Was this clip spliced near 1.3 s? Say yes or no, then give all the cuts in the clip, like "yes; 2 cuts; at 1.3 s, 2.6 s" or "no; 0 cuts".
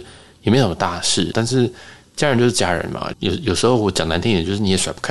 yes; 2 cuts; at 1.3 s, 3.1 s